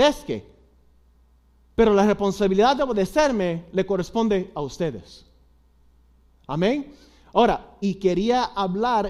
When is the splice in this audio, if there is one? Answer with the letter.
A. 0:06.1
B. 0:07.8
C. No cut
B